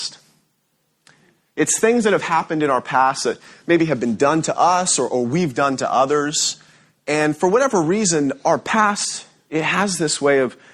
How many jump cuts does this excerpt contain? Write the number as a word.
zero